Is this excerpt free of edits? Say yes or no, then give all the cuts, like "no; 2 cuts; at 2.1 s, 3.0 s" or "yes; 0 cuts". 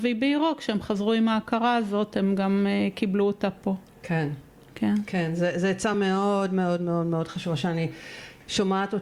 yes; 0 cuts